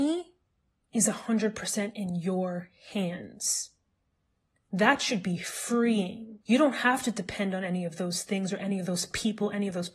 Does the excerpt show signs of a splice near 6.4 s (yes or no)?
yes